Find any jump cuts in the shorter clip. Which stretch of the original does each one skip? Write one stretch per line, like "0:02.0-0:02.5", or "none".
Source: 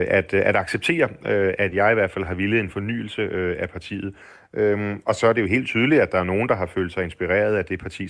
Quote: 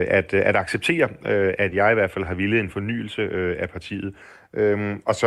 none